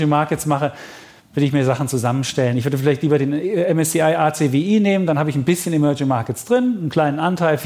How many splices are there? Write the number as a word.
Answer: zero